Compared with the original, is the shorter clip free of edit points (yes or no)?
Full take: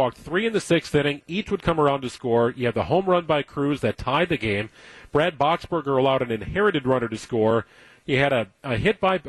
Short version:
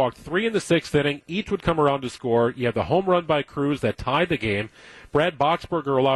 yes